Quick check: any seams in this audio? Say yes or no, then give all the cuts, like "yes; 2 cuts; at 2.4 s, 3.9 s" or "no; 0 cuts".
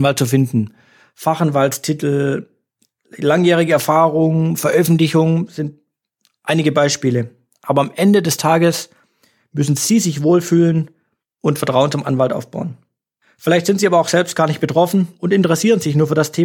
no; 0 cuts